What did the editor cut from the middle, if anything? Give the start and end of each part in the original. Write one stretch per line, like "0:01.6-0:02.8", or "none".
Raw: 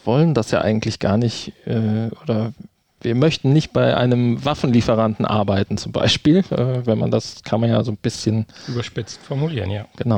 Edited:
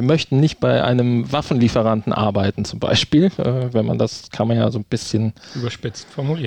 none